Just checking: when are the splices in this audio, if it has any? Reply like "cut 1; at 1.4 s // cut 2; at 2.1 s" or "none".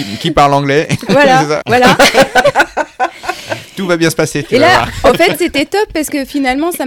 cut 1; at 1.6 s